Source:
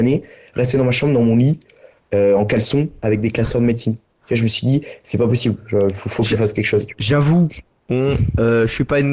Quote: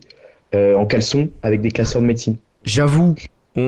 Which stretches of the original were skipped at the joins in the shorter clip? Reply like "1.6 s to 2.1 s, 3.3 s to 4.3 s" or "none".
4.2 s to 6.9 s